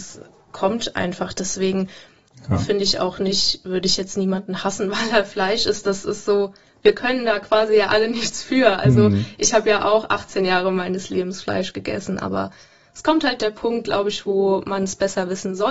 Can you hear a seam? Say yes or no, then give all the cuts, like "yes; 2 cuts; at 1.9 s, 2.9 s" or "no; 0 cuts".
no; 0 cuts